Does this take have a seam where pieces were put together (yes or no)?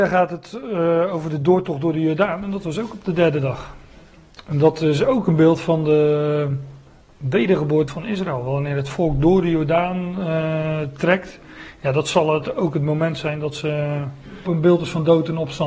yes